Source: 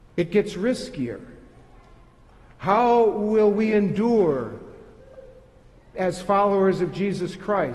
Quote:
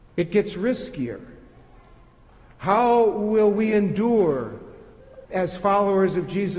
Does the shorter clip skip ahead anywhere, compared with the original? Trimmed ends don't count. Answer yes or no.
yes